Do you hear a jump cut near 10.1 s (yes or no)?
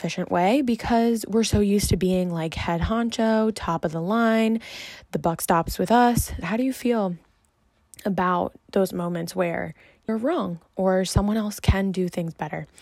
yes